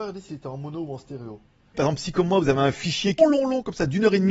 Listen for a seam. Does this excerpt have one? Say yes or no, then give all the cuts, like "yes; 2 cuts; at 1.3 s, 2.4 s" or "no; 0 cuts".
yes; 2 cuts; at 1.7 s, 3.2 s